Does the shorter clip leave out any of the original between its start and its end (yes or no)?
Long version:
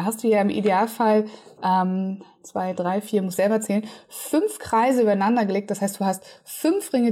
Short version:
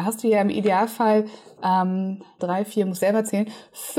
yes